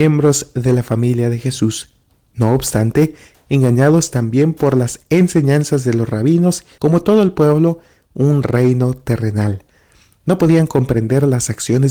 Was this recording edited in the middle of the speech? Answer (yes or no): yes